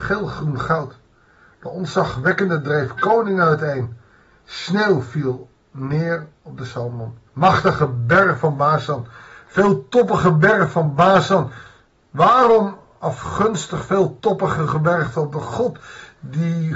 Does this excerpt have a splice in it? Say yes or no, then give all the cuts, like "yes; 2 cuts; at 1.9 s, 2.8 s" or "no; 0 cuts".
yes; 1 cut; at 7.3 s